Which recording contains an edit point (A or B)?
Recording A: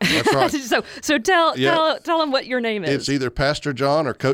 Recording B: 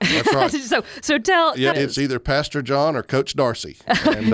B